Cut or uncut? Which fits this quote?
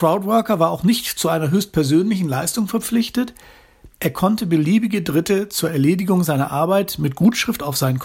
uncut